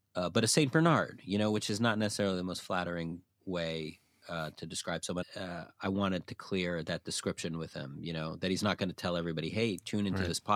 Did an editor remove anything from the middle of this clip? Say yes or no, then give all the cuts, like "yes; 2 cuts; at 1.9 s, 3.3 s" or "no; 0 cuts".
yes; 1 cut; at 5.2 s